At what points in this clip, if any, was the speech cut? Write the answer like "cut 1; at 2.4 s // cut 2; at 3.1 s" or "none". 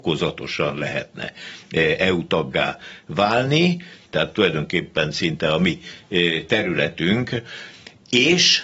cut 1; at 4.1 s